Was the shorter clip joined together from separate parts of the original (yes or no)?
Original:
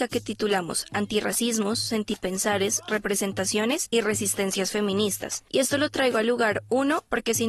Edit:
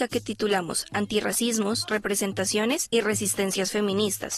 yes